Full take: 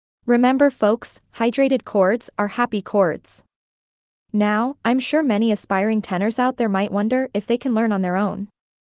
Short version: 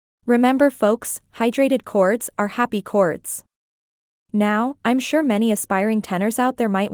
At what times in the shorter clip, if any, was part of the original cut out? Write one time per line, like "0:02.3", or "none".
none